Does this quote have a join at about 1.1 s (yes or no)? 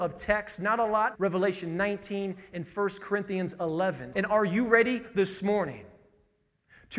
yes